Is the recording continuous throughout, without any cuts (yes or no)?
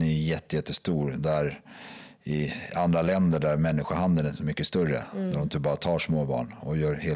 yes